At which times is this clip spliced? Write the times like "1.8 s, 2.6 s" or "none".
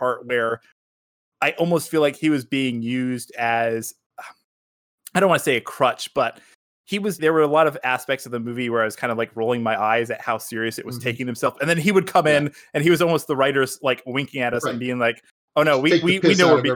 7.2 s